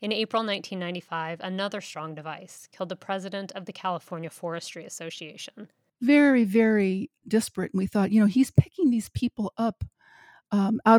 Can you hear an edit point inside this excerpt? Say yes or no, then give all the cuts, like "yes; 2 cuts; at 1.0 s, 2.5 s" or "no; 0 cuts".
yes; 1 cut; at 5.9 s